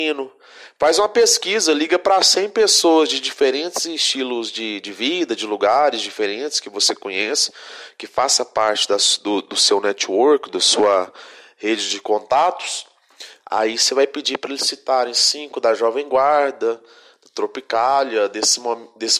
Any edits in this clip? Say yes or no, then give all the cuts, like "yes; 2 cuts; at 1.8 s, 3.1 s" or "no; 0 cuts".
yes; 1 cut; at 13.4 s